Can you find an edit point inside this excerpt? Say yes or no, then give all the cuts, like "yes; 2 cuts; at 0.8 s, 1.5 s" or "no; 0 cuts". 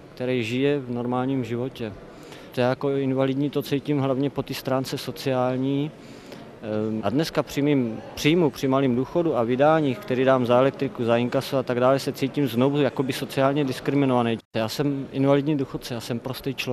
yes; 3 cuts; at 2.5 s, 7.0 s, 14.4 s